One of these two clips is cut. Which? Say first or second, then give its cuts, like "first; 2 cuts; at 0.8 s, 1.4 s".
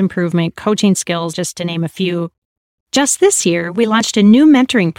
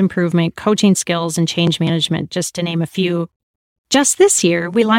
first; 1 cut; at 1.3 s